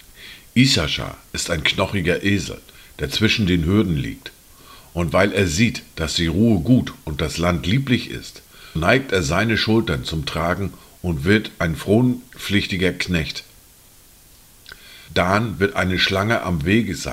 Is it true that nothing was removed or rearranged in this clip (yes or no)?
no